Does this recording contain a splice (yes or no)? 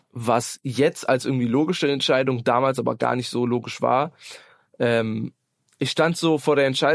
no